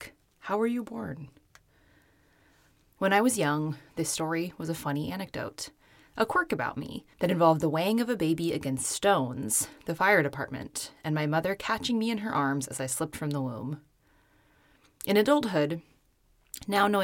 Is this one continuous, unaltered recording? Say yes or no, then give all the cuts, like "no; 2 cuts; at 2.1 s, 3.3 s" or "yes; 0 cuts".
no; 2 cuts; at 3.0 s, 7.1 s